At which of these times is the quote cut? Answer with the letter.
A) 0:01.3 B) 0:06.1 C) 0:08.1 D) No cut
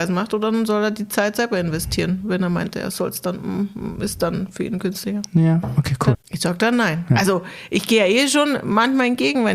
B